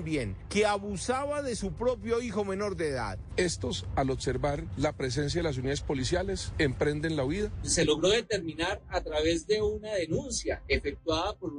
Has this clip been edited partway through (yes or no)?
yes